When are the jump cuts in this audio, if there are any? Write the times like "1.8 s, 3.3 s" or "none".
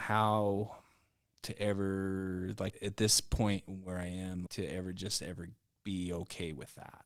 2.7 s, 4.5 s